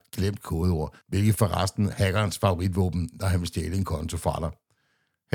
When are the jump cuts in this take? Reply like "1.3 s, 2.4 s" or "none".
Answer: 1.9 s